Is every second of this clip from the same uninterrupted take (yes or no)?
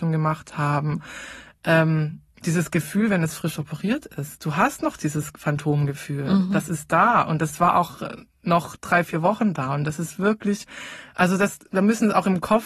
yes